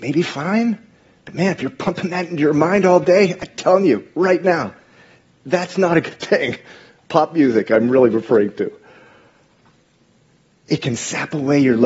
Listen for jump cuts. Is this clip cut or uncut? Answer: uncut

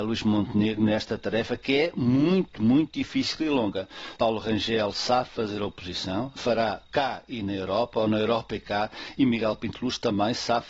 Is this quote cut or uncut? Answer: cut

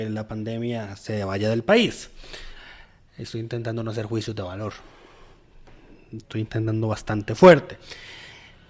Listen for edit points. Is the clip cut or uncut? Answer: uncut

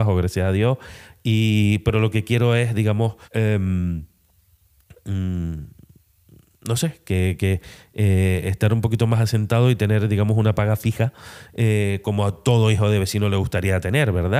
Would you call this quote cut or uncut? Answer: cut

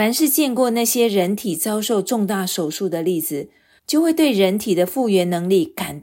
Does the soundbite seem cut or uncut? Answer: cut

